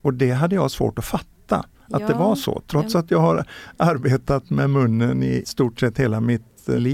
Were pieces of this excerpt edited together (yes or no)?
no